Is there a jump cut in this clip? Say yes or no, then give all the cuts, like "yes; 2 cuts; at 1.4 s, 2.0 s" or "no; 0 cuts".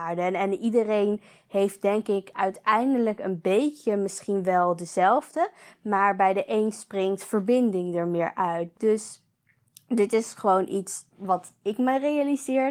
yes; 2 cuts; at 8.7 s, 11.1 s